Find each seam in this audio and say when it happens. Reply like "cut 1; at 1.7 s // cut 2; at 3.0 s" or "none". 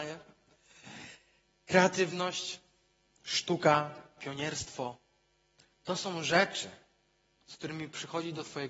none